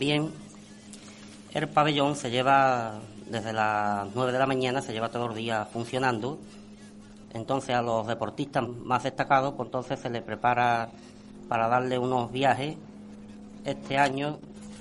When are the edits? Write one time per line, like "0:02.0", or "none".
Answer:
0:07.3
0:08.7

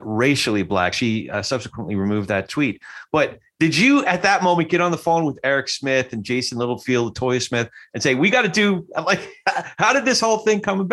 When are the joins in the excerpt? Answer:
none

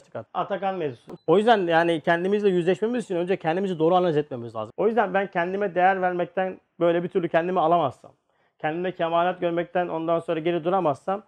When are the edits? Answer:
0:01.2
0:04.7

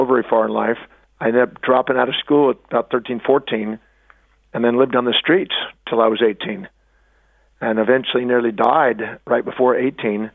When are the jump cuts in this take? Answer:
0:01.0

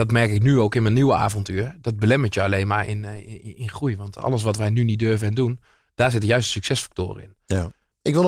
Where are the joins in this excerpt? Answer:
none

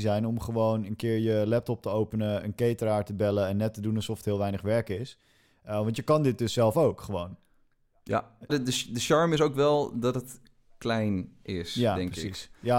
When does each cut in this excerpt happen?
0:08.5

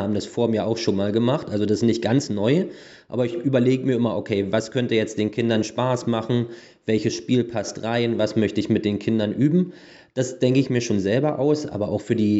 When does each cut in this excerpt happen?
none

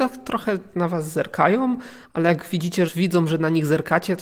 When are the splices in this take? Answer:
0:02.9

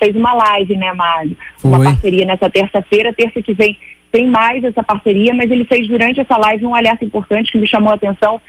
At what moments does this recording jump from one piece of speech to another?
none

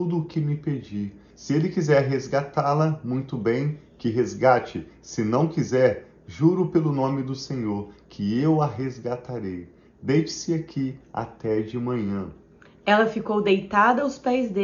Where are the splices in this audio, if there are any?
0:01.3

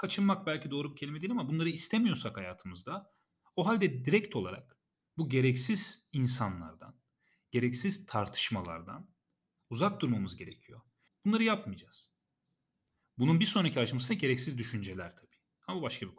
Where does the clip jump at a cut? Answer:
0:11.1

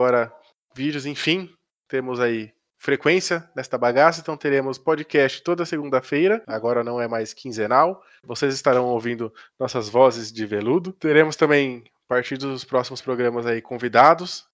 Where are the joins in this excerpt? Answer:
0:08.2

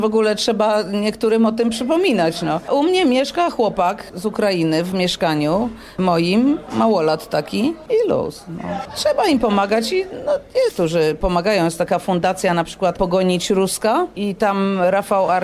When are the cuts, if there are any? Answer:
0:07.9
0:10.7

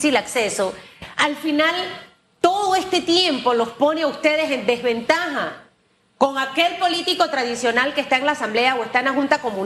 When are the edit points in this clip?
none

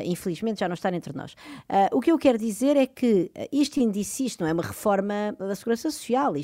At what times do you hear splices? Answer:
0:05.4

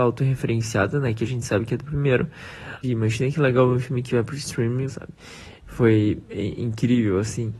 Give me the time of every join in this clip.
0:02.8
0:04.9

